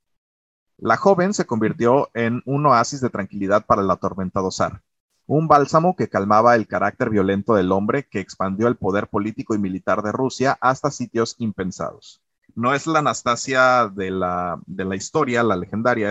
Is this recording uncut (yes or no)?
yes